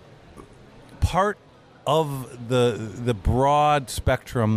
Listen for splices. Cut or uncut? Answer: uncut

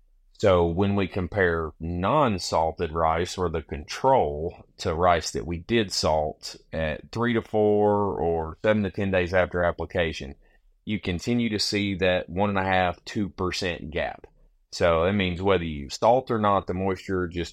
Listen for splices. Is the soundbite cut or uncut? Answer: uncut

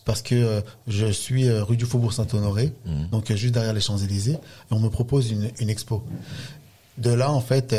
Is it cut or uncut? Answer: uncut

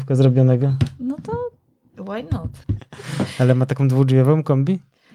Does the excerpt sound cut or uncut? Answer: cut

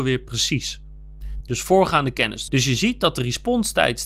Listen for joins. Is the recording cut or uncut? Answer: cut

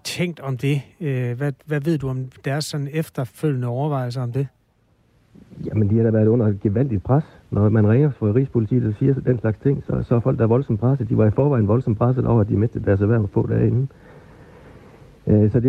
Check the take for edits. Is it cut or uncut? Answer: uncut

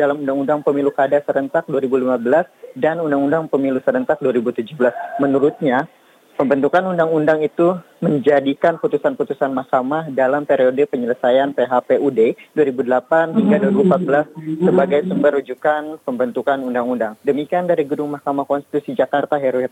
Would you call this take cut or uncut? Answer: uncut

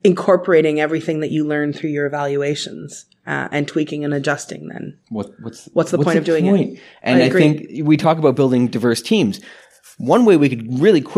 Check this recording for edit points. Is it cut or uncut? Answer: uncut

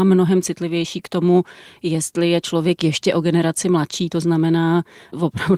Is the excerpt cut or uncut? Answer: uncut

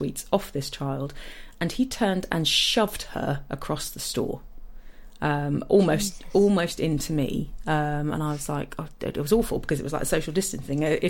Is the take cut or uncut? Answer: uncut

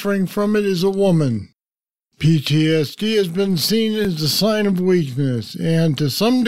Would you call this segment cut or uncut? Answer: uncut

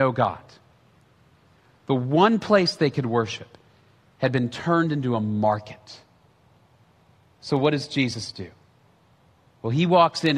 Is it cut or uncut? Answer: uncut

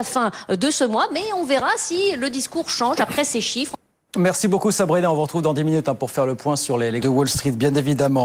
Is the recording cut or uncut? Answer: cut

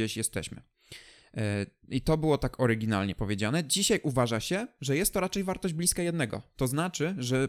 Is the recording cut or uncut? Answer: uncut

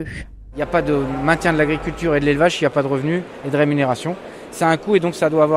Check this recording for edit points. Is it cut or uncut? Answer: uncut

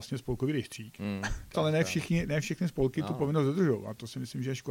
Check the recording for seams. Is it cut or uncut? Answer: cut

